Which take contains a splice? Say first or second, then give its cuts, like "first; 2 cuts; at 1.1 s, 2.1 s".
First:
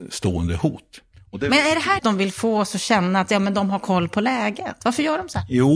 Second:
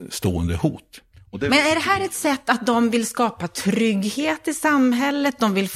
first; 1 cut; at 2.0 s